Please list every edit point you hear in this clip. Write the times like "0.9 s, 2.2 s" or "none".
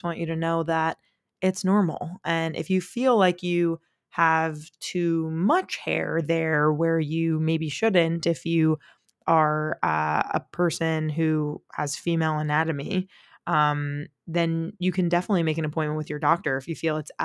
none

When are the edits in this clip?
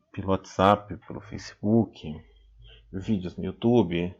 none

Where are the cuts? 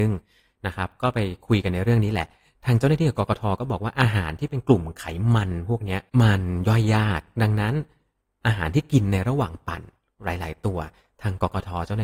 6.1 s

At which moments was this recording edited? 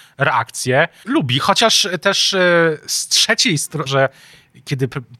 1.0 s, 3.9 s

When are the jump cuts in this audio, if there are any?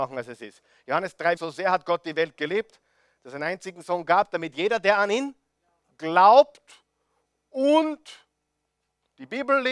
1.4 s

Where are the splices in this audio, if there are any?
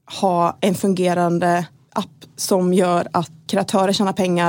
3.5 s

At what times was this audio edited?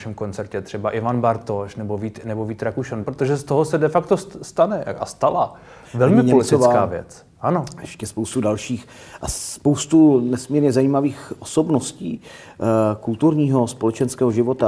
3.0 s

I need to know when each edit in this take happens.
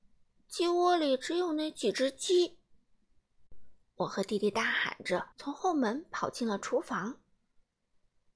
3.8 s, 5.3 s

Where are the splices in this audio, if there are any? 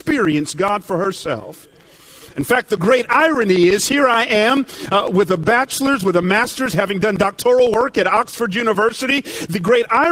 none

